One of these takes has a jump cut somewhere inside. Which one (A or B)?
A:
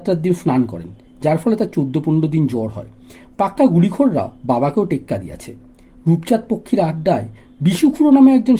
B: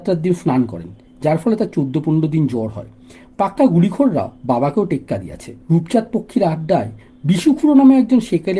B